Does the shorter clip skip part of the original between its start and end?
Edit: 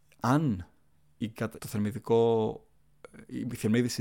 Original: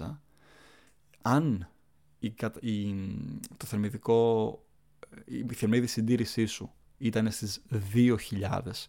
yes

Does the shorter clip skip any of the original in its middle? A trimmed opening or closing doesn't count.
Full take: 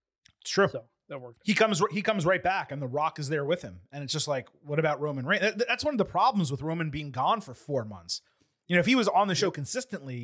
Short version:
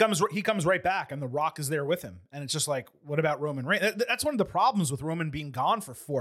no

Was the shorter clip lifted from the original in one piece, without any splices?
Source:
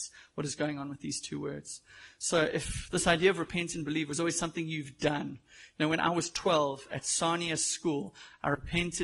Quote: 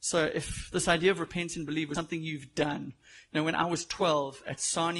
no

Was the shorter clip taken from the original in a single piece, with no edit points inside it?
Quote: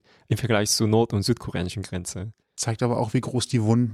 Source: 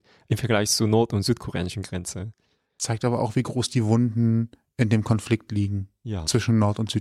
no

